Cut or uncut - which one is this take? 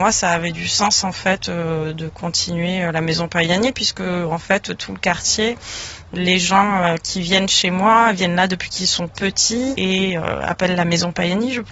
uncut